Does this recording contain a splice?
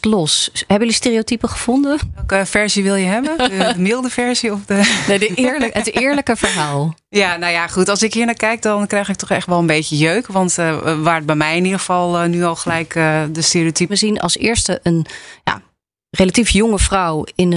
yes; 1 cut; at 13.9 s

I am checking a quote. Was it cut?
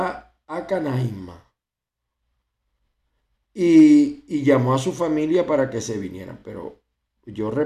no; 0 cuts

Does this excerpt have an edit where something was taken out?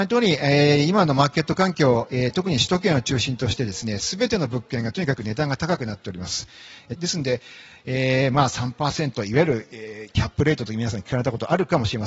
yes; 1 cut; at 7.0 s

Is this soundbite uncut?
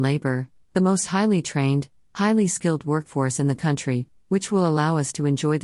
yes; 0 cuts

